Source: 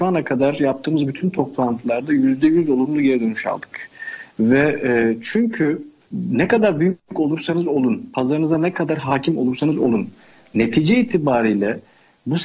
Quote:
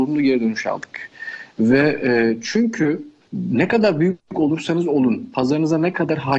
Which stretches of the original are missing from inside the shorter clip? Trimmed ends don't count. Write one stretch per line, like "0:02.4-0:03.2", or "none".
none